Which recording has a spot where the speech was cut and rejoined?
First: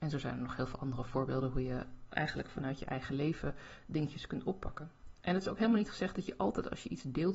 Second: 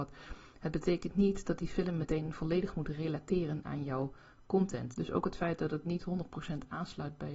second; 1 cut; at 4.9 s

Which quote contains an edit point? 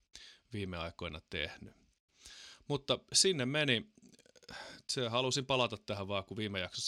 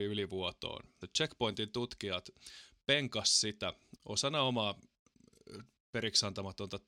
second; 2 cuts; at 1.0 s, 4.0 s

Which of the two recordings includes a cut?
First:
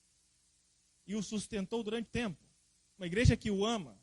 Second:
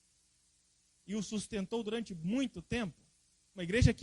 first; 1 cut; at 2.1 s

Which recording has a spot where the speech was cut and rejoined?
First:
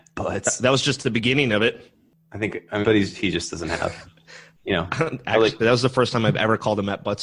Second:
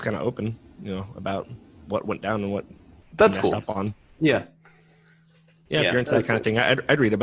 first; 1 cut; at 2.8 s

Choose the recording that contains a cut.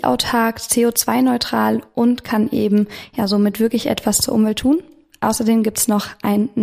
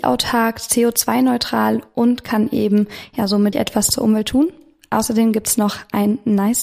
second; 1 cut; at 3.5 s

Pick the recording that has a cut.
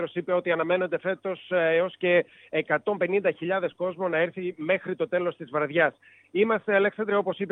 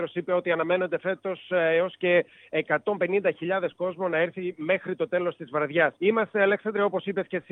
second; 1 cut; at 6.0 s

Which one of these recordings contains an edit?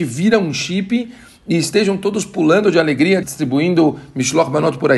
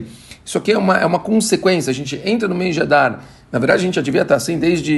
first; 1 cut; at 3.2 s

